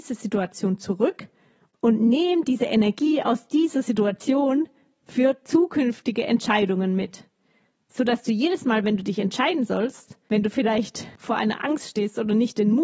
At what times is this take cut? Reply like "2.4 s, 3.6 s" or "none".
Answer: none

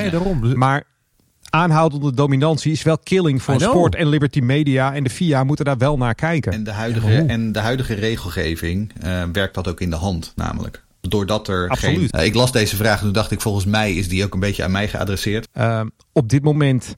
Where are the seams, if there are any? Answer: 12.1 s, 15.4 s

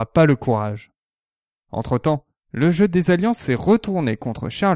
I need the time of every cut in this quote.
1.6 s

